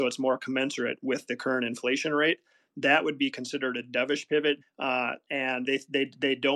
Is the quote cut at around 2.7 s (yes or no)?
no